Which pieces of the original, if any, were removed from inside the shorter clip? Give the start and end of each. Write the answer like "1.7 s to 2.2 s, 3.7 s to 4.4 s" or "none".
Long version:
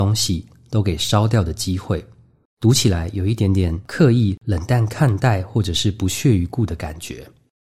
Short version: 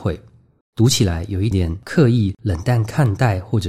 3.4 s to 3.5 s